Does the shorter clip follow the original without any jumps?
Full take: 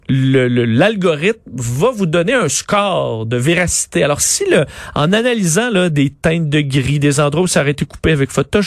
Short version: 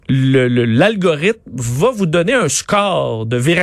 yes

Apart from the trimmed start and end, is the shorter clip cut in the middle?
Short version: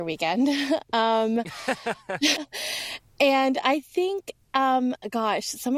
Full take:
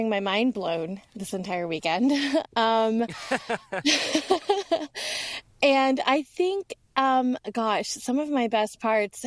yes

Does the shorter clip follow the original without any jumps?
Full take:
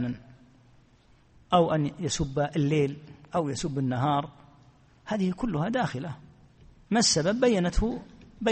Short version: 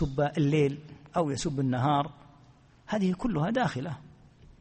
yes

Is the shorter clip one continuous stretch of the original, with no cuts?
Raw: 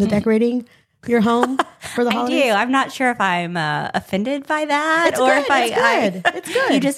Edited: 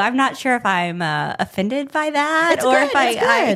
yes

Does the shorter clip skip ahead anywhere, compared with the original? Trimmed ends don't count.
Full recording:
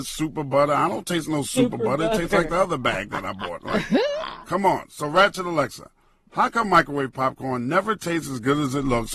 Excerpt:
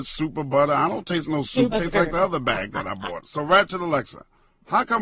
yes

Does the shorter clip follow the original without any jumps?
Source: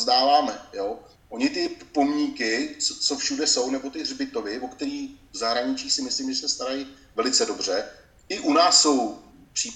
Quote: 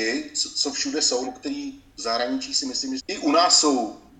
no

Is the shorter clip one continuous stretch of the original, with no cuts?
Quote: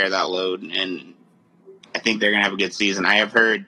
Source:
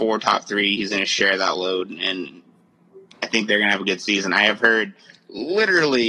yes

